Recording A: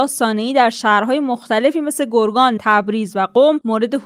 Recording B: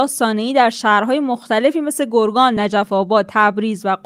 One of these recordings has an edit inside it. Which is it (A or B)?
A